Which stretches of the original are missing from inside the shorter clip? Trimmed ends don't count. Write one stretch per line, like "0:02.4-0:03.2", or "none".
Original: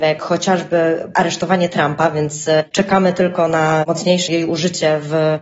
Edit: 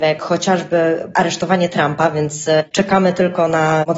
none